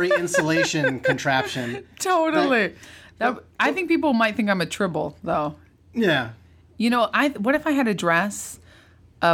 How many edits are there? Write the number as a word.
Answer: zero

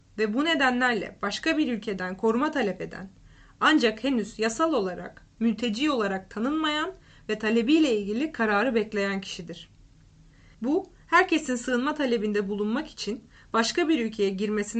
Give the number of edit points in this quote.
one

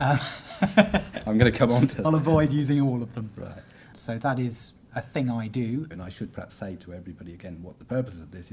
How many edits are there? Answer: three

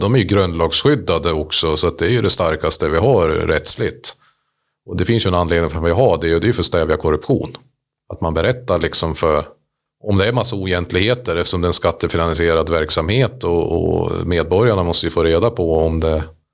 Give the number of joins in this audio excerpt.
zero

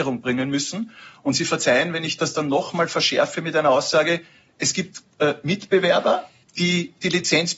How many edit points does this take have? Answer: zero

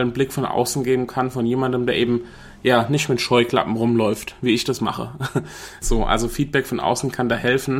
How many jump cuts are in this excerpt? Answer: one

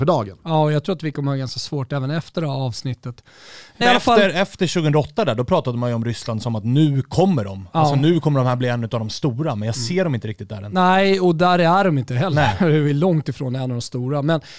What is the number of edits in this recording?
one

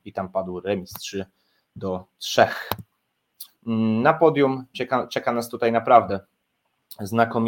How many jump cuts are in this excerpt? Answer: two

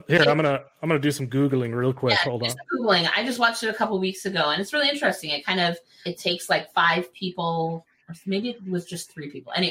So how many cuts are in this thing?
one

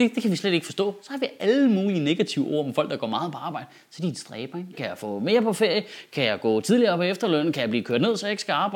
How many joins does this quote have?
one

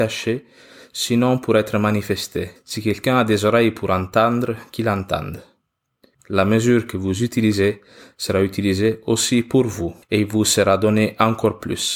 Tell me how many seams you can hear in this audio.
three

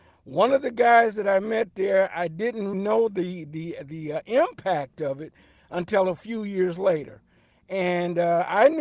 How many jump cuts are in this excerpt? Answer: one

